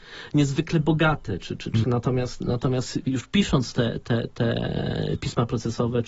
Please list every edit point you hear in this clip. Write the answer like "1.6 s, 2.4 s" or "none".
1.8 s

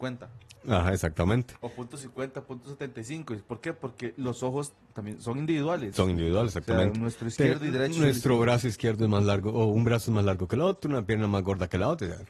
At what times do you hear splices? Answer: none

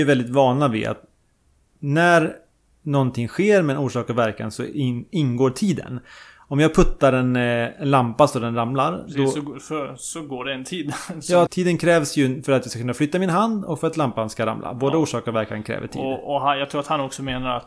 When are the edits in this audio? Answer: 11.5 s

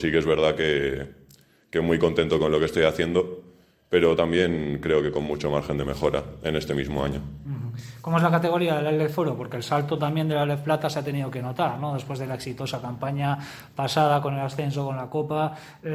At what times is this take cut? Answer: none

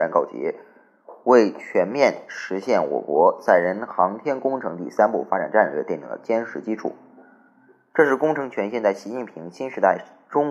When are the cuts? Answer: none

